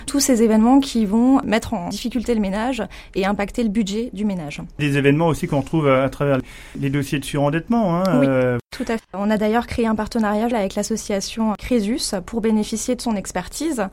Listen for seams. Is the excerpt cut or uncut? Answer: cut